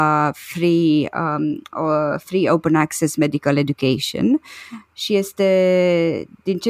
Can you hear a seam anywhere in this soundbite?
no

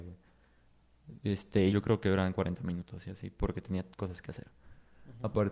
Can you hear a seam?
yes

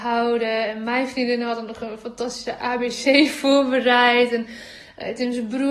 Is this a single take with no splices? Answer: yes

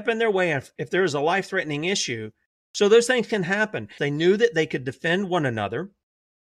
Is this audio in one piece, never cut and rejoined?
no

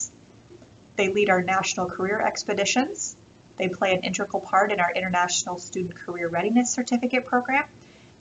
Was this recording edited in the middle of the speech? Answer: no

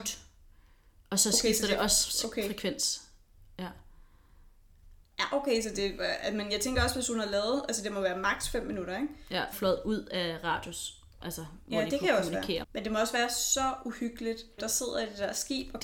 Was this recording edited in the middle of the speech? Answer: yes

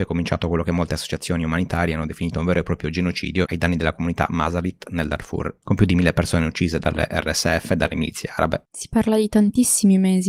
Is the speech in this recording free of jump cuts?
no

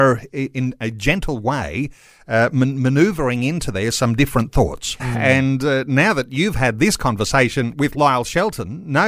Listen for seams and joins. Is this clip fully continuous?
no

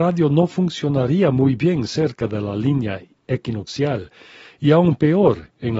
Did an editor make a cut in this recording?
no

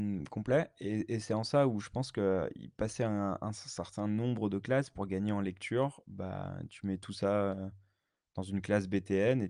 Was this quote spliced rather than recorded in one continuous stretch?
no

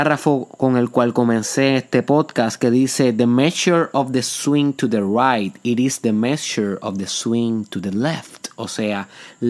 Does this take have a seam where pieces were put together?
no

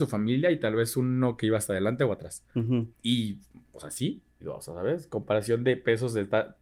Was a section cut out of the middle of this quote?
yes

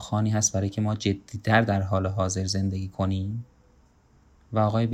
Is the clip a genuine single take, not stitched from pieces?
yes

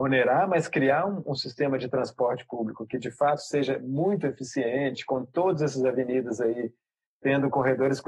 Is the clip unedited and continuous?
yes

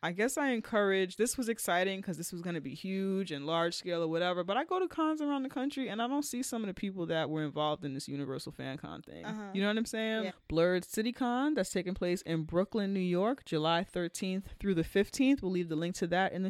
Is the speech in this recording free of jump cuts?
no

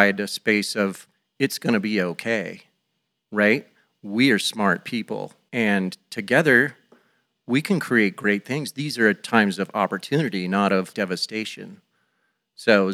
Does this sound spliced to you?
yes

